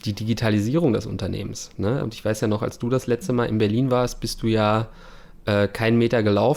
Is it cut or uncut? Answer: cut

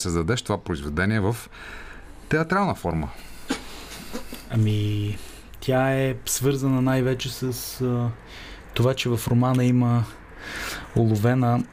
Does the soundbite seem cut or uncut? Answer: uncut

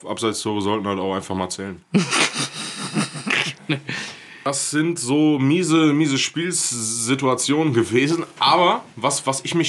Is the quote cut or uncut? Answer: uncut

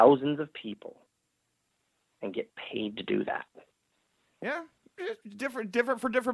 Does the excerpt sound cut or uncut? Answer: cut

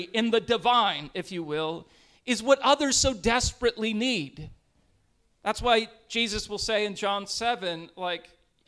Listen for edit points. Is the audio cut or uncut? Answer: uncut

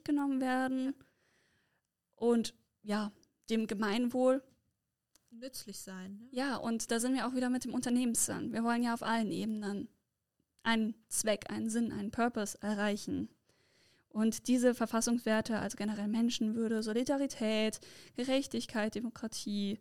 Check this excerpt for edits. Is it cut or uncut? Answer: uncut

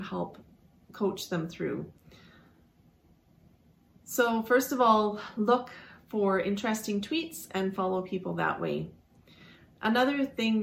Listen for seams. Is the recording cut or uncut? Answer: uncut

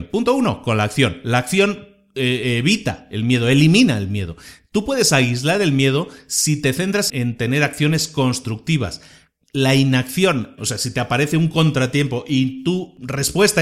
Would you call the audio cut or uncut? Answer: cut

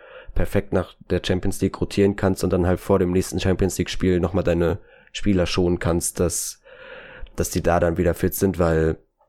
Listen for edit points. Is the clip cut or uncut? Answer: uncut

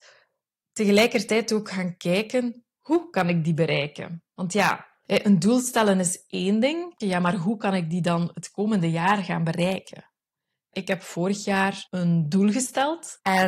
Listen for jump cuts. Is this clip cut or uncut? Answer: cut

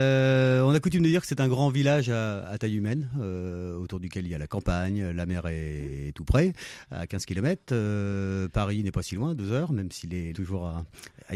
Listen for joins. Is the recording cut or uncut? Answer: cut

